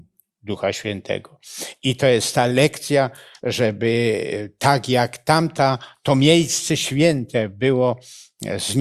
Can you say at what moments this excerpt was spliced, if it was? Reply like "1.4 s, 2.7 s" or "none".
none